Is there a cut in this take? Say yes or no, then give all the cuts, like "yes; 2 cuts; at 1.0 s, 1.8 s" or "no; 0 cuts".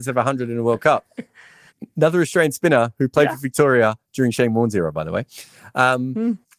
no; 0 cuts